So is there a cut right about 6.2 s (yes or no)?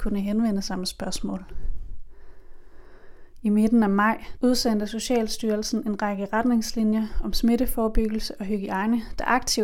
no